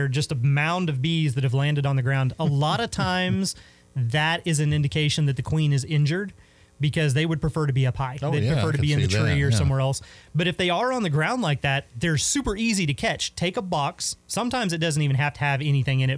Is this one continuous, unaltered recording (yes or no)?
yes